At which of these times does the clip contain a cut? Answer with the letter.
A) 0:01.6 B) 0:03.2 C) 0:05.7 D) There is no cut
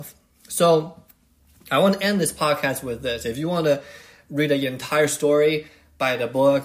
D